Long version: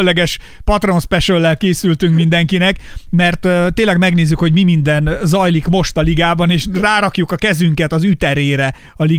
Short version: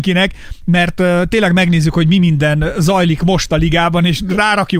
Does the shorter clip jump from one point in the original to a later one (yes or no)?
no